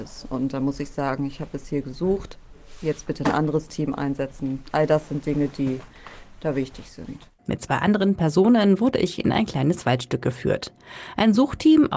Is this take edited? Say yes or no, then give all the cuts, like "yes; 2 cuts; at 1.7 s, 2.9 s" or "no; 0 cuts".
yes; 1 cut; at 7.4 s